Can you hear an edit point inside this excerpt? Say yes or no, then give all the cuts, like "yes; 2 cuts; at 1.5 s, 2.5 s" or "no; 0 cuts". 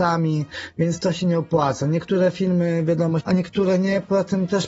yes; 1 cut; at 3.2 s